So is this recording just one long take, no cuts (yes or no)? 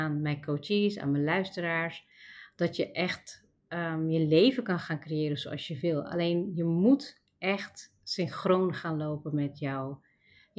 yes